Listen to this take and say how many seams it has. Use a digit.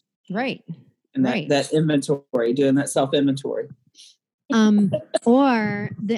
1